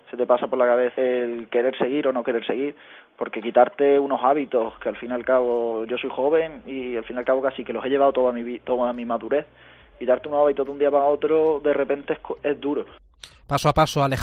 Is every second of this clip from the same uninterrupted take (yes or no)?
no